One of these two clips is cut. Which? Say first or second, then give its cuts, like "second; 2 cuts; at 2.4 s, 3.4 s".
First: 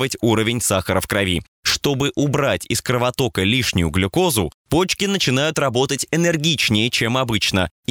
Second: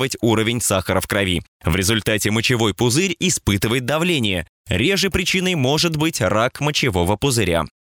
second; 1 cut; at 1.6 s